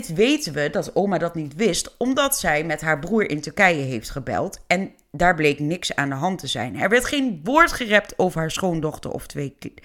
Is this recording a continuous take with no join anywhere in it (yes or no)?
yes